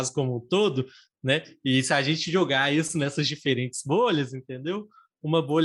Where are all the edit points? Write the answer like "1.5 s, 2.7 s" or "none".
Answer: none